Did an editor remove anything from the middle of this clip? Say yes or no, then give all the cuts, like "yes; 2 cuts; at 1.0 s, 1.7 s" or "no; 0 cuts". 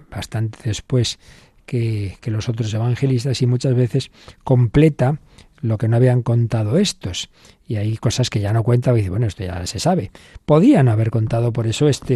no; 0 cuts